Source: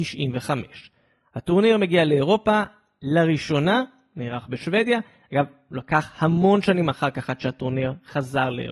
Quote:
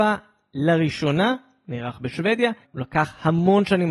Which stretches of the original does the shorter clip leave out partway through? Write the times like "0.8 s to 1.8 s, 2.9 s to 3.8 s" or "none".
5.1 s to 5.6 s